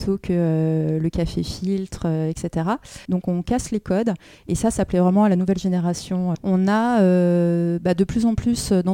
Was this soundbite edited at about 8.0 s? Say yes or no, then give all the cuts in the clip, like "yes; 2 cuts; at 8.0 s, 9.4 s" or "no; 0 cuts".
no; 2 cuts; at 3.0 s, 6.3 s